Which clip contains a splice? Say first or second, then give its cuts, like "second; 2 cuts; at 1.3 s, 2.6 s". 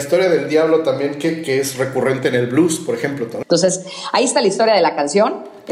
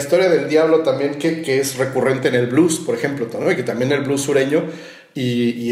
first; 1 cut; at 3.4 s